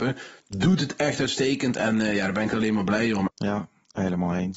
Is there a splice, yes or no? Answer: yes